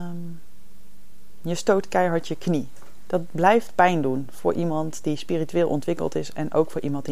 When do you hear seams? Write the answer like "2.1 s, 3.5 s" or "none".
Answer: none

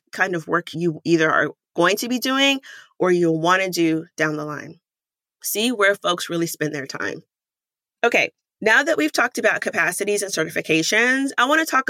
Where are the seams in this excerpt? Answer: none

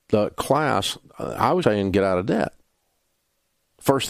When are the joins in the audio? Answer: 1.6 s

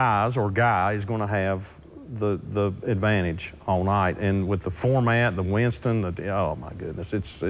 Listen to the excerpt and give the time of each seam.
none

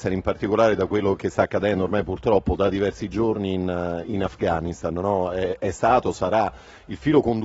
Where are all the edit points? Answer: 1.2 s

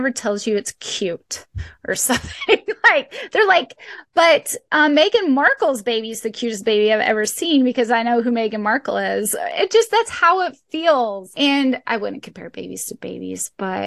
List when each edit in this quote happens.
none

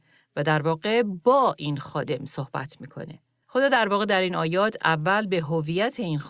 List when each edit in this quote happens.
3.4 s

